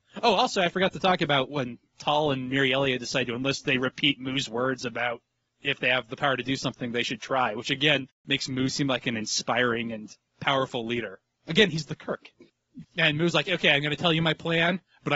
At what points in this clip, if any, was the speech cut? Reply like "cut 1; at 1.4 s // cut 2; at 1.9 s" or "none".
cut 1; at 12.8 s

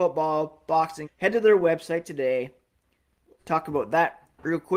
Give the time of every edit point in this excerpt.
cut 1; at 1.0 s // cut 2; at 3.4 s

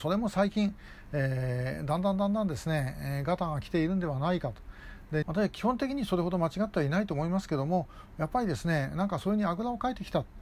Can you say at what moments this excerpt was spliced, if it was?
cut 1; at 5.2 s

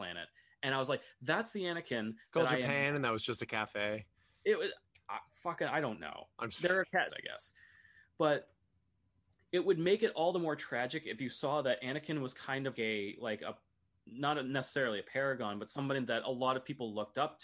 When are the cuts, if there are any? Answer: cut 1; at 7.1 s // cut 2; at 12.8 s

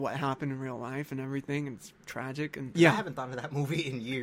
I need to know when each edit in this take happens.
cut 1; at 2.7 s

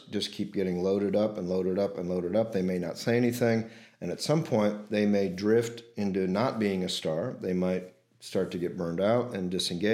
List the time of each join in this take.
none

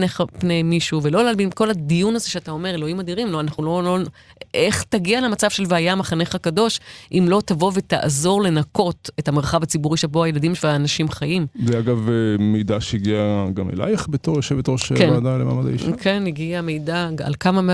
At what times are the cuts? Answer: none

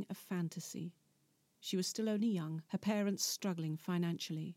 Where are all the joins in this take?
cut 1; at 2.7 s

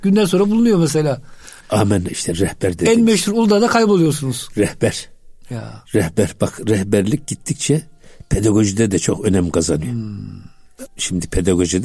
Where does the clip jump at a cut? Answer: cut 1; at 1.6 s // cut 2; at 10.9 s

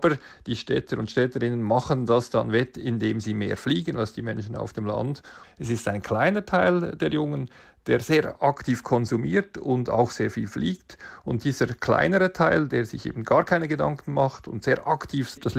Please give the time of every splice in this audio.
cut 1; at 5.4 s

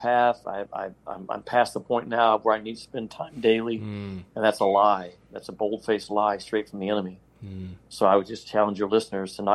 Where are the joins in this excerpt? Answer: none

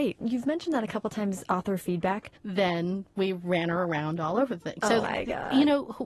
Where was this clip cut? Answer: cut 1; at 2.3 s // cut 2; at 5.0 s

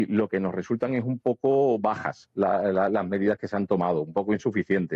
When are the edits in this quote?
none

